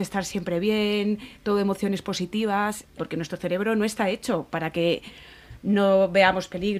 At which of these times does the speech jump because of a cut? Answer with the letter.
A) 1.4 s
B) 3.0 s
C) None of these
B